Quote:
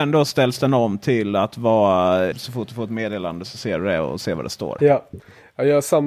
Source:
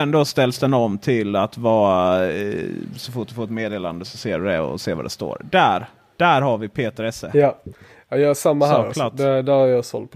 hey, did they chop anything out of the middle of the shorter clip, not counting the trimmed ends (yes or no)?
yes